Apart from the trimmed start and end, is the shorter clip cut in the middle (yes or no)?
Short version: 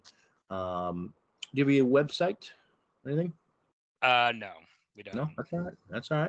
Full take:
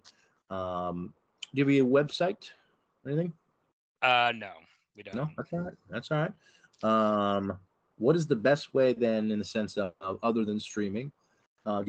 no